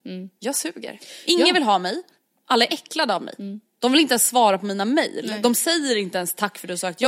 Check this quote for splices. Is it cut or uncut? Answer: uncut